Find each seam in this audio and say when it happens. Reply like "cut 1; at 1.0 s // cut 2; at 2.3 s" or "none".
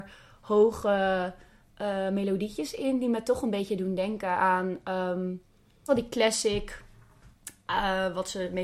cut 1; at 5.9 s